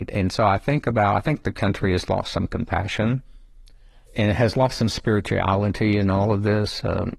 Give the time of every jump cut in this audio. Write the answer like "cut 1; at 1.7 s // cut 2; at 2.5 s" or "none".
cut 1; at 4.1 s